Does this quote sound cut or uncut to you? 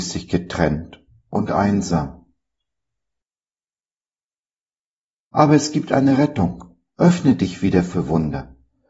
cut